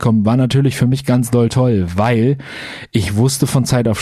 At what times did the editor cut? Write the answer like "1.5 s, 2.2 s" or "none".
none